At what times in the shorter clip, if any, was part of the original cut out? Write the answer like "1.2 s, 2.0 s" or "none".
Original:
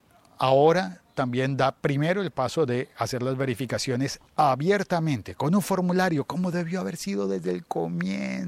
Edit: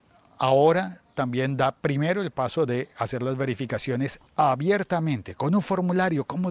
none